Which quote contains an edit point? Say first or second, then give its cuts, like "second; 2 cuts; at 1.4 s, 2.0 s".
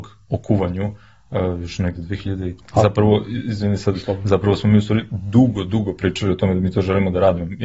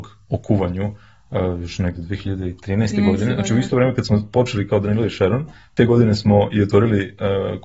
first; 1 cut; at 2.6 s